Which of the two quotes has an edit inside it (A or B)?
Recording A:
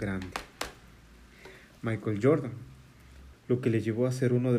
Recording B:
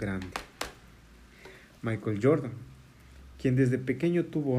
A